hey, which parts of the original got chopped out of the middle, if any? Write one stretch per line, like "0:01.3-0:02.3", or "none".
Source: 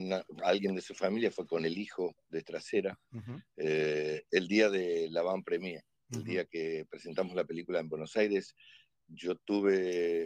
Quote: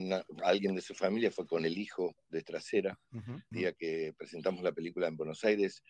0:03.5-0:06.2